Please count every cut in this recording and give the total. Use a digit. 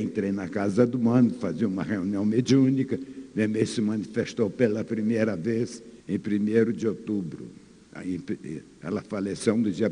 1